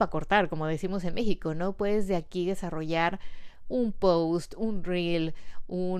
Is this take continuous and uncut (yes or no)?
yes